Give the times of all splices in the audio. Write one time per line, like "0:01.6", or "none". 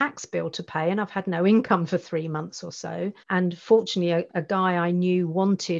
0:03.2
0:04.3